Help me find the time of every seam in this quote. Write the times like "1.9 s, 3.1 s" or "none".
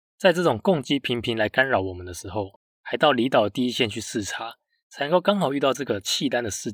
none